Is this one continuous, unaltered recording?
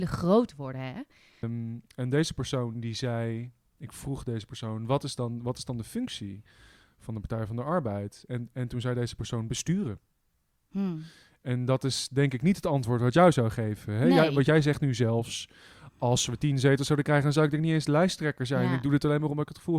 no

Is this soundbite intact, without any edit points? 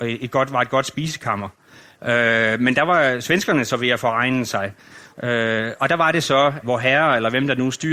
no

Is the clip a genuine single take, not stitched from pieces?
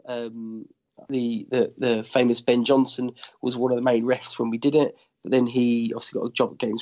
yes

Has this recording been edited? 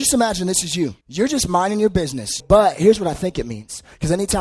yes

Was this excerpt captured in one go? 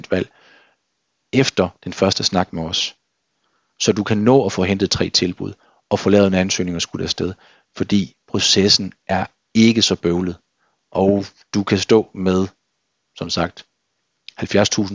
yes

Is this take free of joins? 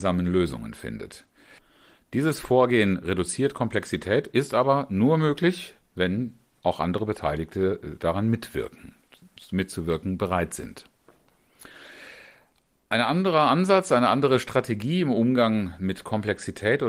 yes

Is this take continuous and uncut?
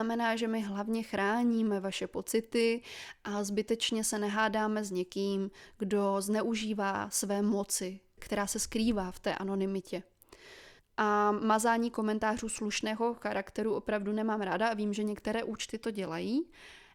no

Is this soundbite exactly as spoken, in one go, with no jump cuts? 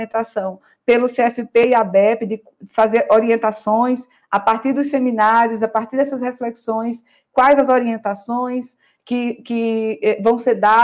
yes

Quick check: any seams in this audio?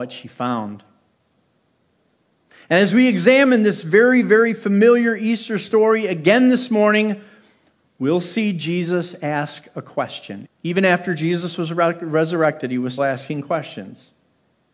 yes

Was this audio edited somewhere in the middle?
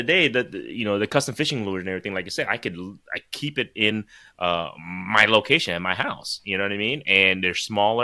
no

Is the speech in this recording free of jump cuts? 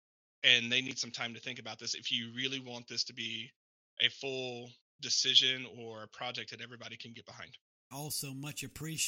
no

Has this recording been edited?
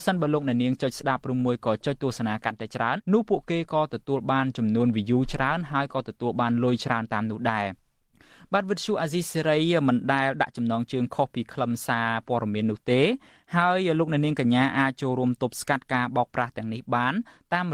yes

